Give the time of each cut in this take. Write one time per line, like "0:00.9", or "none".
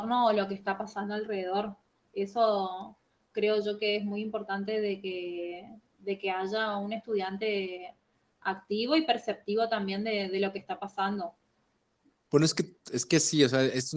0:12.3